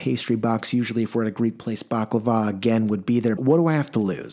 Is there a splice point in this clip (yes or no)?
yes